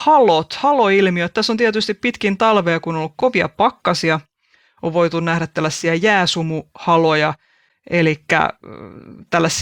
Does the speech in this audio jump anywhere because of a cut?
no; 0 cuts

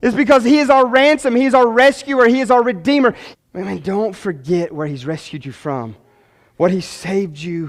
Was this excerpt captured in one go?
no; 1 cut; at 3.3 s

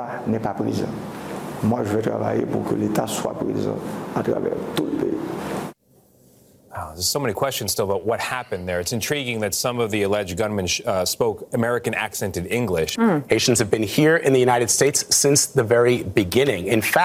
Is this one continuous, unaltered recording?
no; 1 cut; at 13.0 s

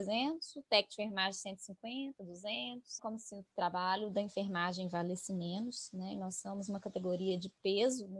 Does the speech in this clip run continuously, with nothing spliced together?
no; 1 cut; at 3.0 s

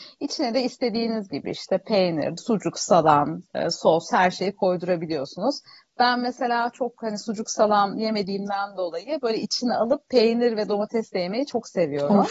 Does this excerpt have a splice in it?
yes; 1 cut; at 2.4 s

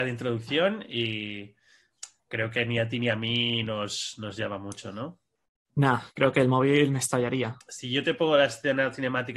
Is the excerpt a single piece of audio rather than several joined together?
no; 2 cuts; at 2.2 s, 7.6 s

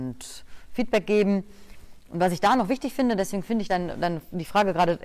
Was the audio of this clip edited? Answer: no; 0 cuts

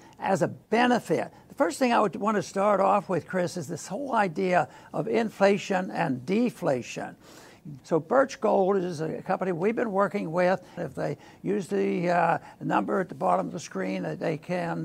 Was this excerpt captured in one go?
no; 3 cuts; at 1.4 s, 7.8 s, 10.8 s

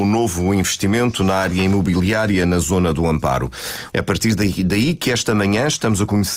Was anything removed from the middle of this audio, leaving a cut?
yes; 1 cut; at 3.9 s

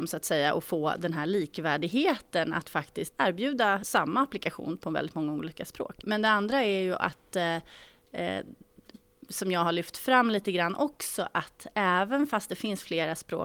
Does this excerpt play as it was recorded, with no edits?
yes; 0 cuts

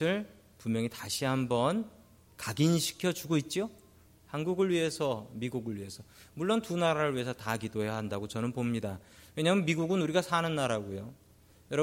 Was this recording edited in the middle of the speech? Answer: yes; 1 cut; at 4.1 s

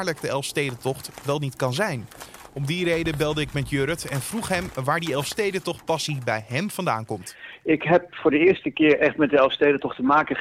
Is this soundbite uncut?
yes; 0 cuts

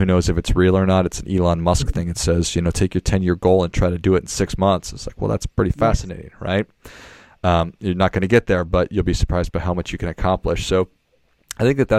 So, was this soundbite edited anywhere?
no; 0 cuts

